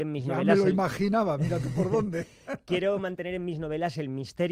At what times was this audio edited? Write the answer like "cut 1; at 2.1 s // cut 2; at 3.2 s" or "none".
none